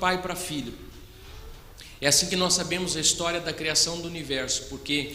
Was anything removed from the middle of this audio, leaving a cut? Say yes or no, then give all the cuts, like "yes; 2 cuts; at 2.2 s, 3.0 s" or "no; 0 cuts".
no; 0 cuts